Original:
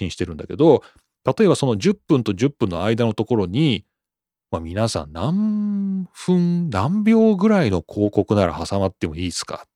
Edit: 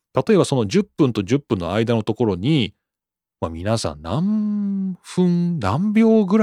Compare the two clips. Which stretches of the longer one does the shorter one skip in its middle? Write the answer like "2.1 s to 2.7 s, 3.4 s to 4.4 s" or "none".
none